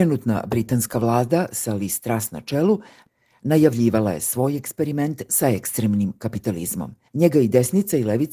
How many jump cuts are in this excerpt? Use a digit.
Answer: 1